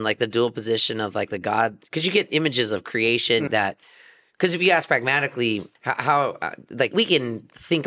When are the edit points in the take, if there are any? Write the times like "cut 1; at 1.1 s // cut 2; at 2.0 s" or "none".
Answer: cut 1; at 3.5 s // cut 2; at 5.8 s // cut 3; at 6.9 s